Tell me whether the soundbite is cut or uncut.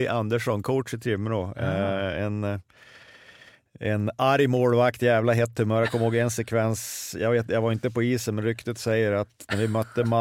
uncut